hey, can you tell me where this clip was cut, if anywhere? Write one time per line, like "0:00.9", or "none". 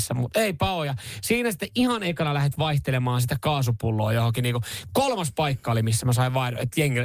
none

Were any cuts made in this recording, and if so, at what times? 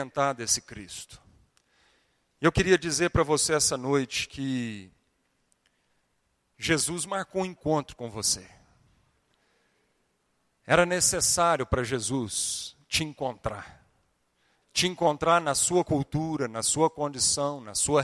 0:14.6

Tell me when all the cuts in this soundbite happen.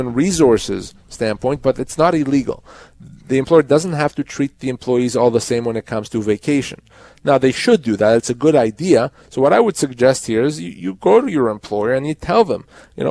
none

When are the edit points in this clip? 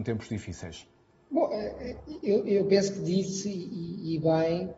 none

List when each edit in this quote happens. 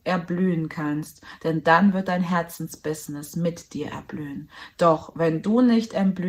none

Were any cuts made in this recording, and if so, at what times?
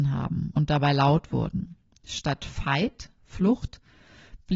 0:03.2

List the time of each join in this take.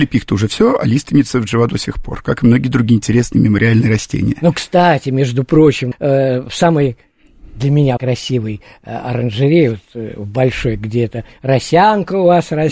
0:05.9
0:08.0

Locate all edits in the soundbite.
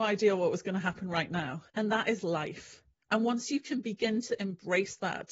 0:01.7

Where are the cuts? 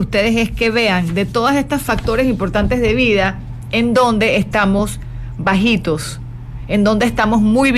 none

